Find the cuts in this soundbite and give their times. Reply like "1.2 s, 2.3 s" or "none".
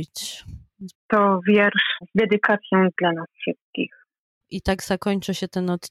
0.9 s, 4.4 s